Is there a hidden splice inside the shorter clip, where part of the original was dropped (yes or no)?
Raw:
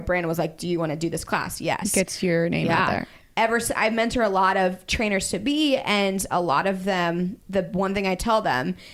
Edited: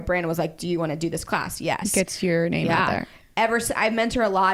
no